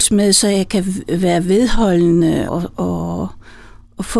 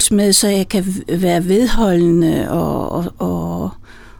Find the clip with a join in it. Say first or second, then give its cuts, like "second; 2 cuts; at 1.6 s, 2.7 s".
first; 1 cut; at 2.5 s